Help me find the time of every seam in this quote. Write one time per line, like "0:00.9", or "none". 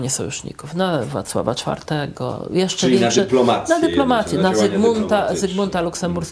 none